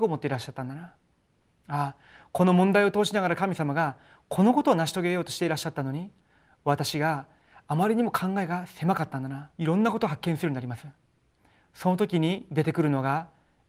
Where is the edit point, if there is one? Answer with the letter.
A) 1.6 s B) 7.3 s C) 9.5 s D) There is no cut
C